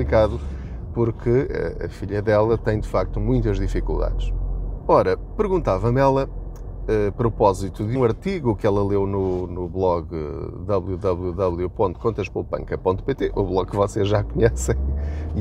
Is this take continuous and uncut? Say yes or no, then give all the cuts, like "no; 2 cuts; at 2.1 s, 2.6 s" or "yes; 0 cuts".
no; 1 cut; at 8.0 s